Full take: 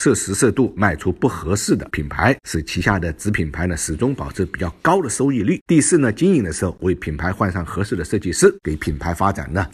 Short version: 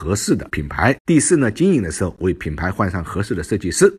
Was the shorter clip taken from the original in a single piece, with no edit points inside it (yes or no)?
no